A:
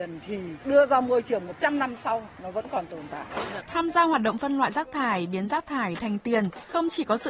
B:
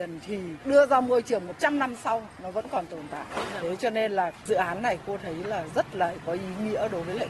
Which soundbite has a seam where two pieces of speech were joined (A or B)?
A